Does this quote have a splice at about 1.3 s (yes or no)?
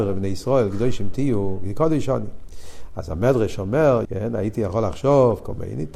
no